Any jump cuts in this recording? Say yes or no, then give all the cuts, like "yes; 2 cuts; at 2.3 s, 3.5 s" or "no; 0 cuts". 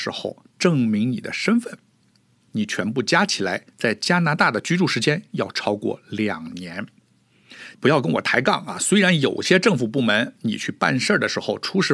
yes; 2 cuts; at 2.5 s, 7.7 s